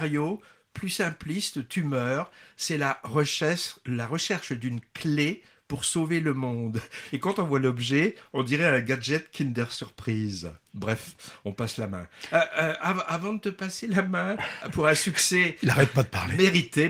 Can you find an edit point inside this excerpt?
yes; 1 cut; at 14.6 s

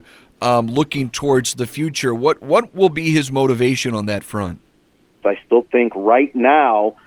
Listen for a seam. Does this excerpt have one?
yes; 1 cut; at 5.2 s

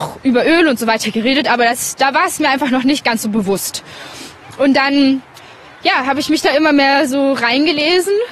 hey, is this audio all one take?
yes; 0 cuts

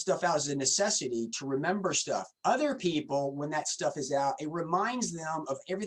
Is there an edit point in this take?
yes; 1 cut; at 2.4 s

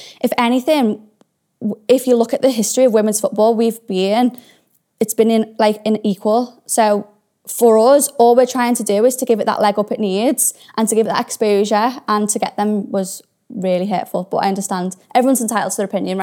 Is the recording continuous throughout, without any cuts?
yes; 0 cuts

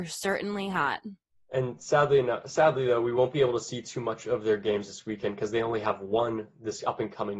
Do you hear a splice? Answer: no; 0 cuts

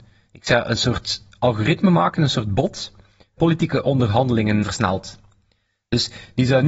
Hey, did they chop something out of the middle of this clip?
yes; 2 cuts; at 3.4 s, 4.6 s

